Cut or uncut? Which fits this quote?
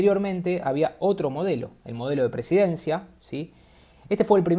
uncut